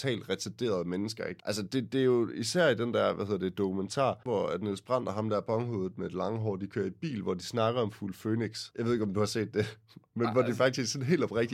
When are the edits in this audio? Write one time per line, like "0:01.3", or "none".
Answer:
0:04.3